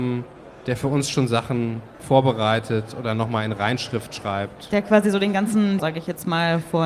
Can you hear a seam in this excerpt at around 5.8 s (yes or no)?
yes